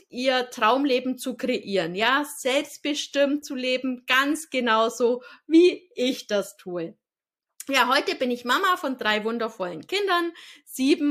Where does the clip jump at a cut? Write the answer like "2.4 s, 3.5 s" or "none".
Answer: none